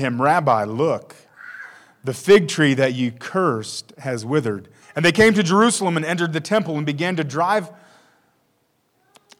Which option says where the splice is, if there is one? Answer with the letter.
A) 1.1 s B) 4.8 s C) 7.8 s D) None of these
B